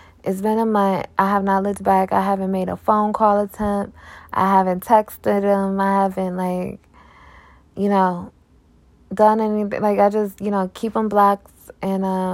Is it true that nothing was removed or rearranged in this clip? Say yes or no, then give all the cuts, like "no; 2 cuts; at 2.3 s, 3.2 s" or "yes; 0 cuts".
yes; 0 cuts